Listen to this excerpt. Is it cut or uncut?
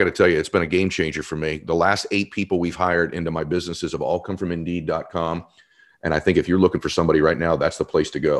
uncut